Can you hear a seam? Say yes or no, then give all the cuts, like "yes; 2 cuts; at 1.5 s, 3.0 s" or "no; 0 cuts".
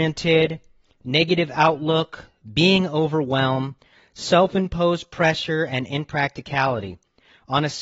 no; 0 cuts